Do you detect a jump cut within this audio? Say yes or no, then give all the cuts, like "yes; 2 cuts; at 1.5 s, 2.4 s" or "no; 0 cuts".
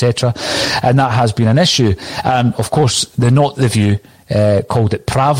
no; 0 cuts